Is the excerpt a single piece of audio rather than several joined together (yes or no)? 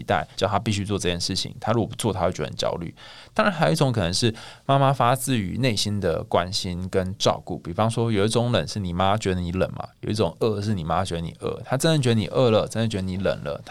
yes